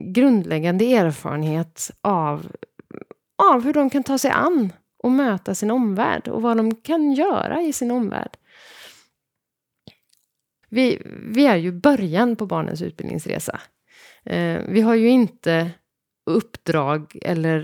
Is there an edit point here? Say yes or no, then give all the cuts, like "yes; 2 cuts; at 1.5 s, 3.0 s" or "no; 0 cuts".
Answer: yes; 1 cut; at 10.6 s